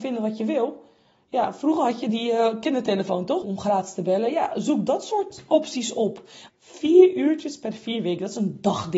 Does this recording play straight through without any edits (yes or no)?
no